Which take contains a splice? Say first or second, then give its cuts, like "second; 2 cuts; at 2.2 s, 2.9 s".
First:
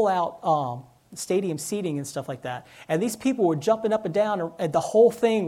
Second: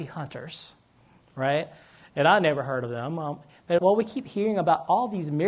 second; 1 cut; at 3.8 s